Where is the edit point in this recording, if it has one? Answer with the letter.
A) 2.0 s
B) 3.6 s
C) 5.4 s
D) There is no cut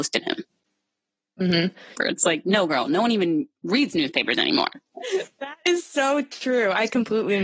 A